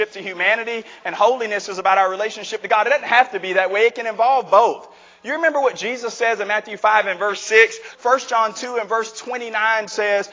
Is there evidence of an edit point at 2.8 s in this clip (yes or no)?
no